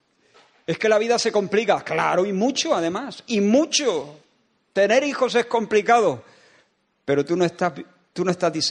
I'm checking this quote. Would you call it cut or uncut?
uncut